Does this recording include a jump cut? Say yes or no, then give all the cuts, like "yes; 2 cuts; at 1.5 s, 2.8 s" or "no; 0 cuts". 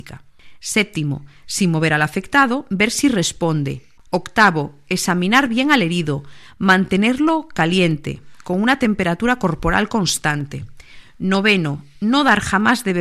yes; 1 cut; at 4.0 s